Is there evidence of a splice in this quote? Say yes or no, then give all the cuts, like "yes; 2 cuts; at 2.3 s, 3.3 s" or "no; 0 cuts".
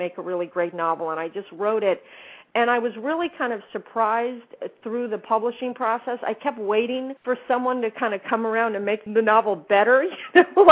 yes; 2 cuts; at 7.2 s, 9.1 s